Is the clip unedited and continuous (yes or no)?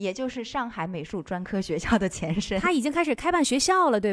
yes